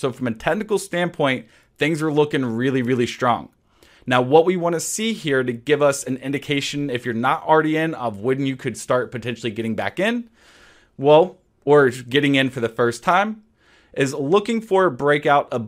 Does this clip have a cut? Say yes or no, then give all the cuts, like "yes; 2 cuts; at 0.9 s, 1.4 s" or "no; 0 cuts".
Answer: no; 0 cuts